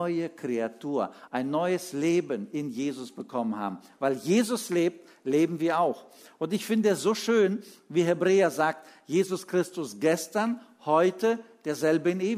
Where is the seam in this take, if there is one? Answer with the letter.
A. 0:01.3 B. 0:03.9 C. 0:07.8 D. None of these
A